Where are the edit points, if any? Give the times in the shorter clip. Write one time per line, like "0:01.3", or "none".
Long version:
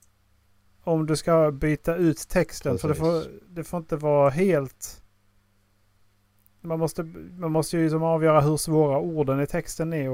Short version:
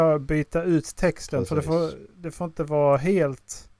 none